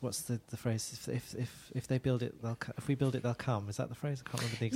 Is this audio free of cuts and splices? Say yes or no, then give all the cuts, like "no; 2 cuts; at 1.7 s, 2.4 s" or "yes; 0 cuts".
yes; 0 cuts